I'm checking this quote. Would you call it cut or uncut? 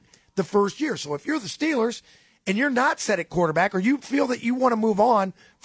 uncut